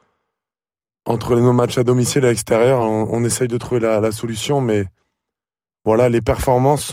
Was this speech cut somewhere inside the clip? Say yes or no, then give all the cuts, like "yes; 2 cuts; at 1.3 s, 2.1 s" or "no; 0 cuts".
no; 0 cuts